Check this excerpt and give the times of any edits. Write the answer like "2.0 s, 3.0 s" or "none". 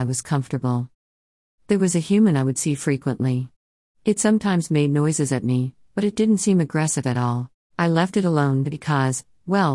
7.7 s

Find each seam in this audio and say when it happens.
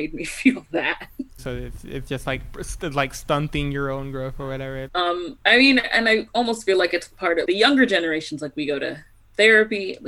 1.4 s, 4.9 s, 7.4 s

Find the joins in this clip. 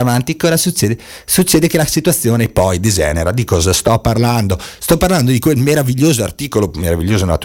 none

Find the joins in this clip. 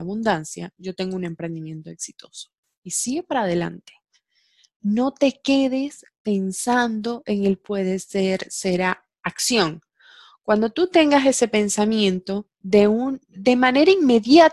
13.3 s

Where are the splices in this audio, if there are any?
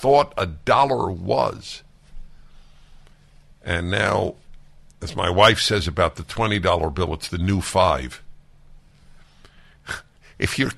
none

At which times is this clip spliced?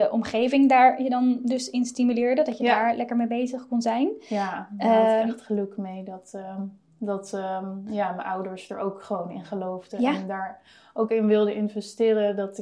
none

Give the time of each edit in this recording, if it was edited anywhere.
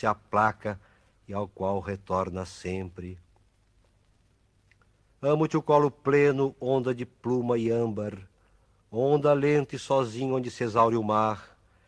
5.1 s

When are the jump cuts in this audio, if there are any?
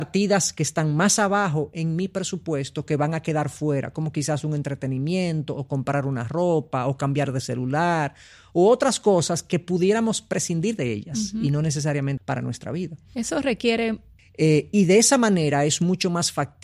12.2 s, 14.2 s

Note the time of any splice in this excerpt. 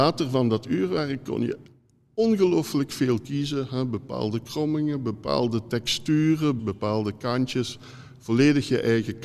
6.6 s

